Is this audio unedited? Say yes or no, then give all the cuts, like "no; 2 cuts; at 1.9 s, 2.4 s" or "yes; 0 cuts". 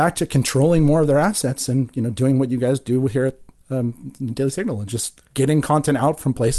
yes; 0 cuts